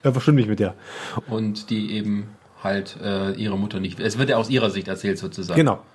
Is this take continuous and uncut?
no; 1 cut; at 1.2 s

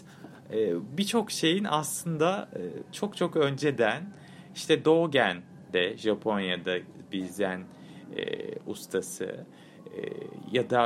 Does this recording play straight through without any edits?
yes; 0 cuts

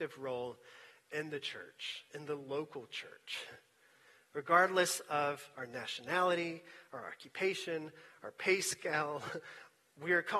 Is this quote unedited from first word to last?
yes; 0 cuts

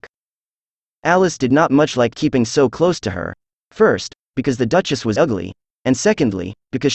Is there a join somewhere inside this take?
yes; 1 cut; at 5.2 s

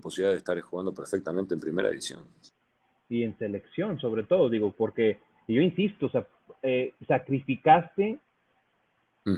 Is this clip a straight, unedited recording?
yes; 0 cuts

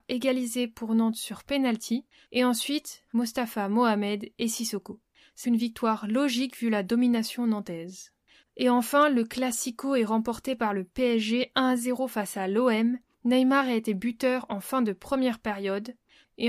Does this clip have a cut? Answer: yes; 2 cuts; at 3.1 s, 5.4 s

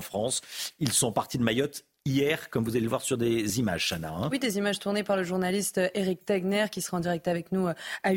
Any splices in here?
no; 0 cuts

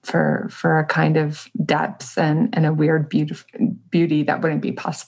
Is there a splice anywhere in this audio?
no; 0 cuts

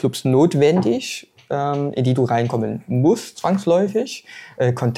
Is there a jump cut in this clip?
no; 0 cuts

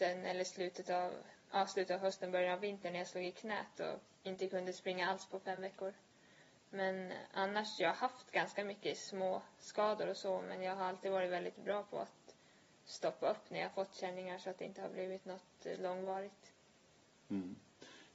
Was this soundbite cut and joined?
no; 0 cuts

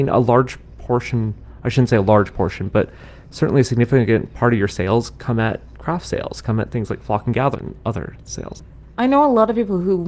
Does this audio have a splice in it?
yes; 1 cut; at 7.5 s

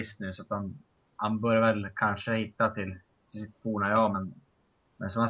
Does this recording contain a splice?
no; 0 cuts

